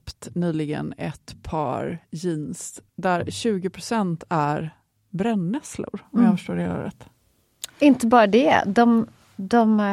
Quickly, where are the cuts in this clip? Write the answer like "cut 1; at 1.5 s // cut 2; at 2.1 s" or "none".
cut 1; at 2.9 s